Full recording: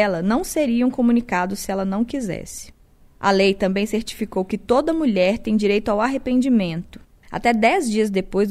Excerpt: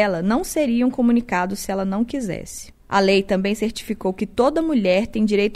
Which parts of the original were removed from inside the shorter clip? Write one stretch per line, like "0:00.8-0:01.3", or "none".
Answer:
0:02.8-0:03.1

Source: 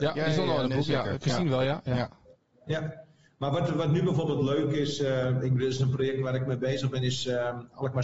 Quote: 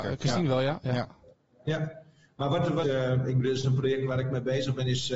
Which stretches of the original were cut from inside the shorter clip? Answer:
0:03.8-0:05.0

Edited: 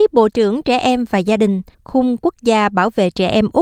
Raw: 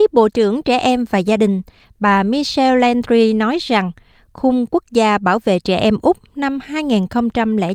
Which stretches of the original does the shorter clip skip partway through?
0:01.7-0:04.2

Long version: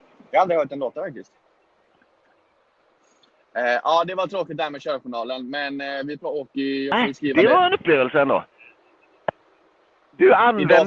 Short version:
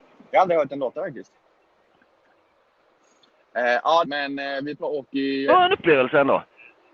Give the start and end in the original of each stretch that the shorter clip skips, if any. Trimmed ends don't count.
0:04.0-0:05.5
0:06.9-0:07.5

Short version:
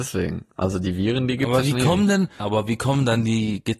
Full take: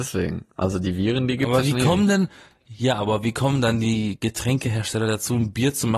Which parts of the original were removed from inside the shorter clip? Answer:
0:02.4-0:03.0

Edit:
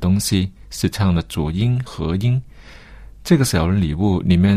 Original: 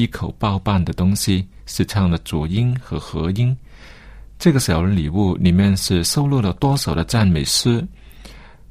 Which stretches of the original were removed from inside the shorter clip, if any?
0:02.8-0:03.0

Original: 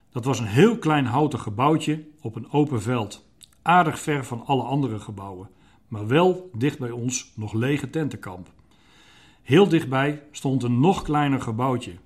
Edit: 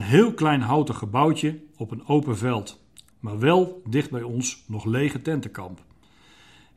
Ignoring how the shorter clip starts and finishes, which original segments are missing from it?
0:03.5-0:05.8

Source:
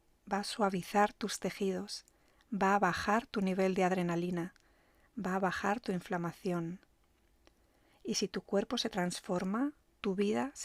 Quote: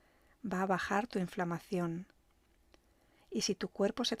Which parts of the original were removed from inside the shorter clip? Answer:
none

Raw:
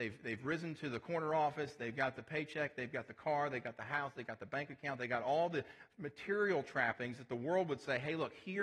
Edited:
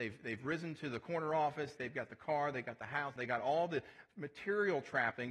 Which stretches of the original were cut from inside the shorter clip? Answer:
0:01.8-0:02.7
0:04.1-0:05.0

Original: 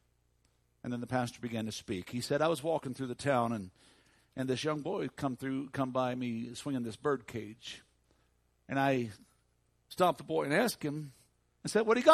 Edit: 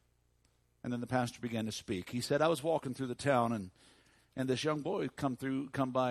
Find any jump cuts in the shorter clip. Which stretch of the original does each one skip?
none

